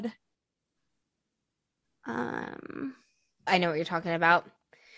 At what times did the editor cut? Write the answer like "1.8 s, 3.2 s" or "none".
3.5 s